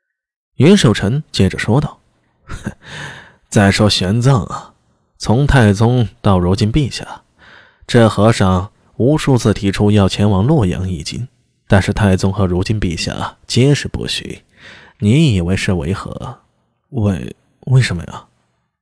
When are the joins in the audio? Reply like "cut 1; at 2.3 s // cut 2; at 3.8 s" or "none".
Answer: none